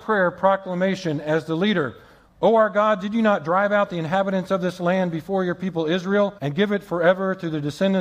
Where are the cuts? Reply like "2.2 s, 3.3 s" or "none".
2.3 s, 6.4 s

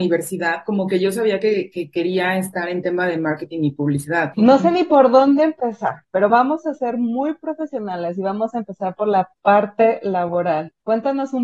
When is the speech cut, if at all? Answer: 4.3 s, 6.3 s

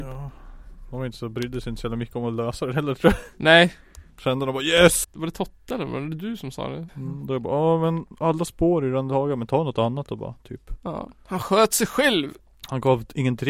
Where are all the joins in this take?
5.0 s, 6.9 s

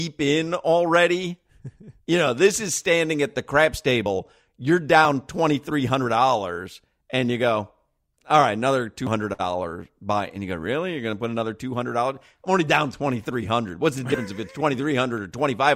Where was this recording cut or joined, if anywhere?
none

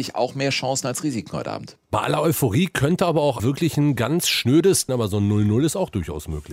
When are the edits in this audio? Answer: 3.4 s, 4.9 s

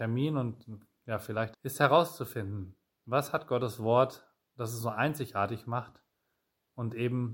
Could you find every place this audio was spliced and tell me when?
1.5 s

